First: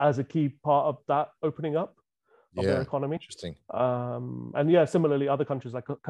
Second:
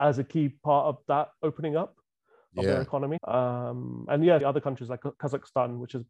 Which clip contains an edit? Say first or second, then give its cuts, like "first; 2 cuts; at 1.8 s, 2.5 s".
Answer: second; 2 cuts; at 3.2 s, 4.4 s